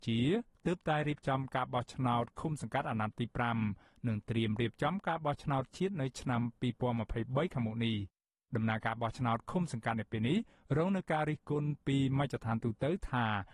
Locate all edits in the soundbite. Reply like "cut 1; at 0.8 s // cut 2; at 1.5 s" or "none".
none